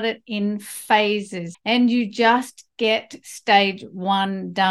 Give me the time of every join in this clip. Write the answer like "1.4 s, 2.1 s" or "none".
1.5 s